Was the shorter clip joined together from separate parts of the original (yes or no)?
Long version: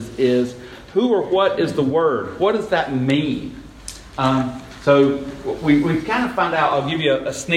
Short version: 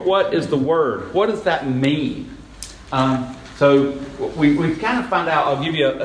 no